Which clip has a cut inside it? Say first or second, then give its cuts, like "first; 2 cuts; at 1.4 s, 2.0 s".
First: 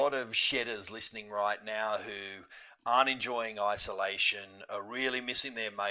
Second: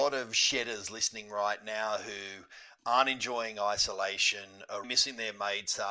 second; 1 cut; at 4.8 s